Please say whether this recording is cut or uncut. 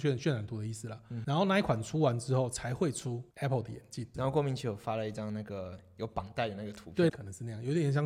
cut